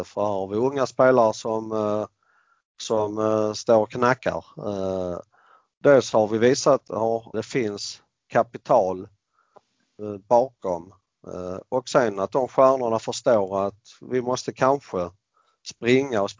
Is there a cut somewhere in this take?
yes; 1 cut; at 7.3 s

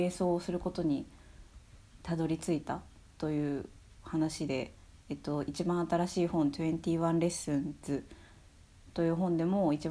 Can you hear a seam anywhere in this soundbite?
no; 0 cuts

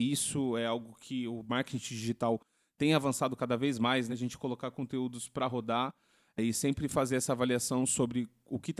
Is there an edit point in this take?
yes; 1 cut; at 4.1 s

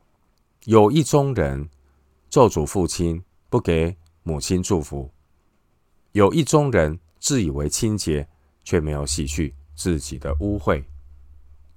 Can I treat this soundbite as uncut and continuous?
yes; 0 cuts

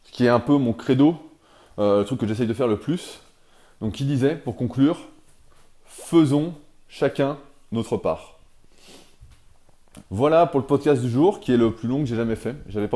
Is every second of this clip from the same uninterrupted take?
no; 1 cut; at 10.0 s

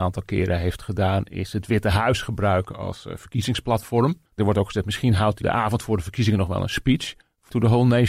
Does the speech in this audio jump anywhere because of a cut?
yes; 2 cuts; at 4.3 s, 5.4 s

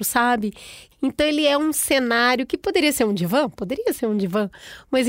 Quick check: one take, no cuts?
no; 1 cut; at 0.9 s

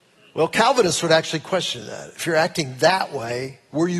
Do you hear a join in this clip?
no; 0 cuts

